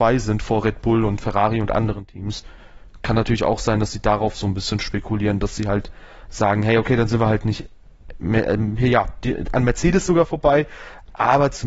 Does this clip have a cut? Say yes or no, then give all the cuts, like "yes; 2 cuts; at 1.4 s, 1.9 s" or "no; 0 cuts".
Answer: no; 0 cuts